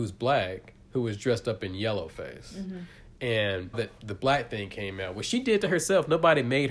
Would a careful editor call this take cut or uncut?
cut